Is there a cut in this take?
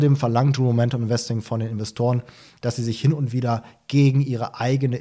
no; 0 cuts

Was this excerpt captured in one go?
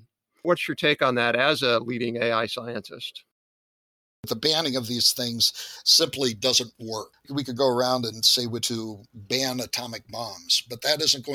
no; 1 cut; at 8.6 s

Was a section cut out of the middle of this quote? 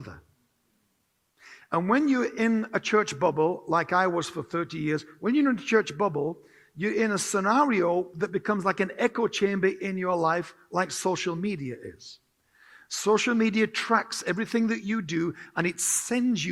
no; 0 cuts

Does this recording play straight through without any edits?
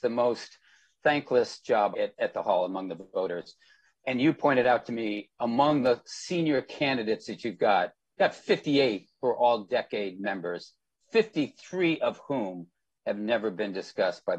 no; 1 cut; at 1.9 s

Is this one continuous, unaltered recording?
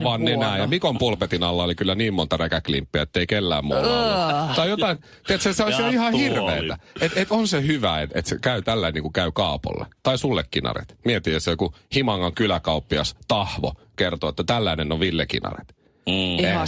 yes; 0 cuts

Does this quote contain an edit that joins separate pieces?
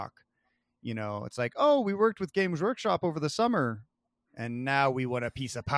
no; 0 cuts

